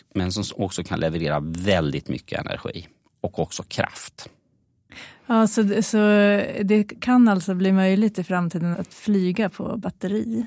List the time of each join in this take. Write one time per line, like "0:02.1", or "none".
0:08.7